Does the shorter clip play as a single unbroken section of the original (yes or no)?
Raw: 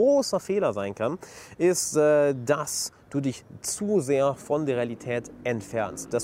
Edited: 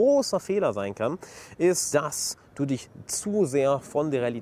no